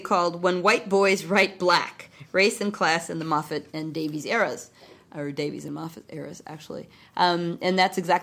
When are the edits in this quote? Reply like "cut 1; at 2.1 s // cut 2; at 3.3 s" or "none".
none

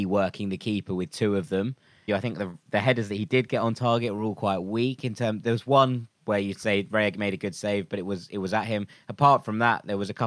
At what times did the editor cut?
cut 1; at 2.1 s

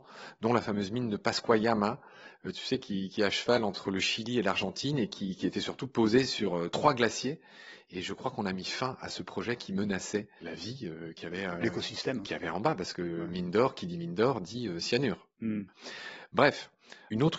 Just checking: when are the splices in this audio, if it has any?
cut 1; at 10.4 s

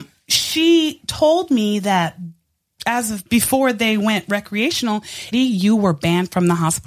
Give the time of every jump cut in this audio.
cut 1; at 2.8 s // cut 2; at 5.3 s

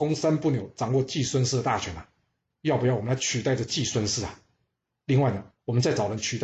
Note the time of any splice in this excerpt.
cut 1; at 2.5 s

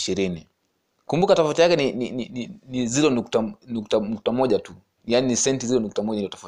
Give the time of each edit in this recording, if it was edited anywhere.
none

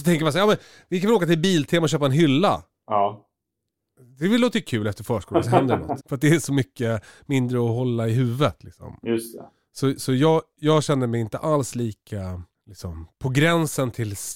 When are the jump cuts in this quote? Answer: cut 1; at 6.0 s

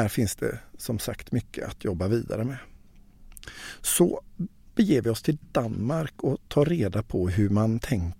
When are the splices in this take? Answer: none

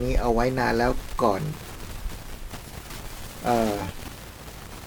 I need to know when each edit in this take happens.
none

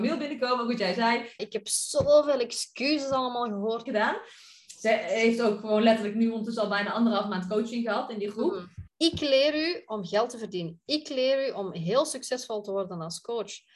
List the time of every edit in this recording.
cut 1; at 1.4 s // cut 2; at 3.9 s // cut 3; at 8.9 s

